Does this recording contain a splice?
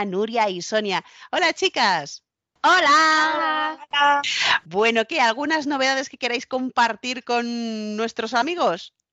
no; 0 cuts

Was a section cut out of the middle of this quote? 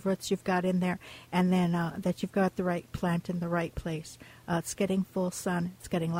no; 0 cuts

